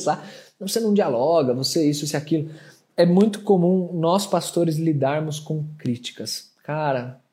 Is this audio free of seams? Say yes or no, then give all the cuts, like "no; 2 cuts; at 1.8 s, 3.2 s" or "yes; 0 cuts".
yes; 0 cuts